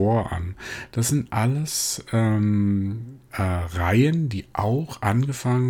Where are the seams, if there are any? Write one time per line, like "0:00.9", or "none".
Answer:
0:03.3

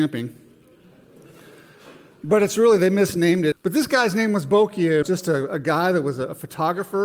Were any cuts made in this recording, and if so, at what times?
0:03.5
0:05.0

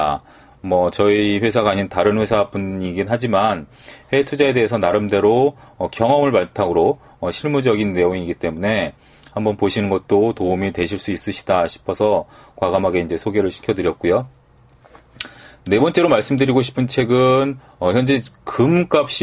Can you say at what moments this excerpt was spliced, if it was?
none

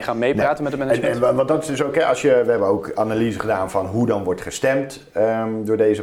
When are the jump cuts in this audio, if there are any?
none

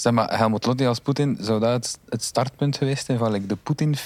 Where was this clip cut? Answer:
none

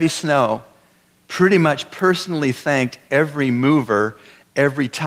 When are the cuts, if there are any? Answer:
0:01.2

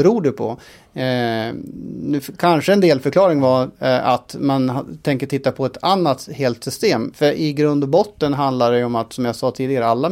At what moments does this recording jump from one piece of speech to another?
0:07.1

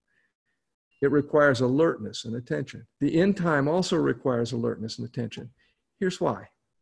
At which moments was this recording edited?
0:00.9
0:02.9

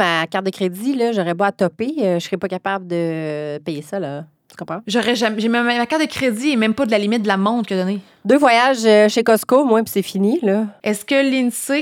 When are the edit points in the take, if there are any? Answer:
0:10.8

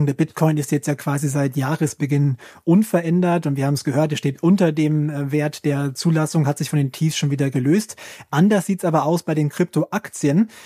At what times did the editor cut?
none

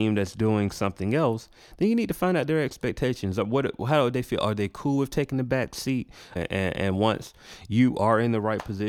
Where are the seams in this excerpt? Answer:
0:06.4

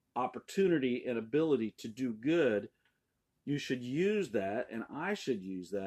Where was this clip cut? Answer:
none

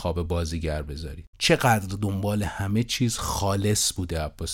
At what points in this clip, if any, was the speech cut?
0:01.3

